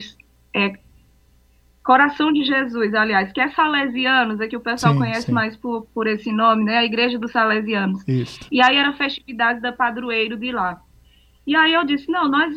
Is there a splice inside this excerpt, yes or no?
no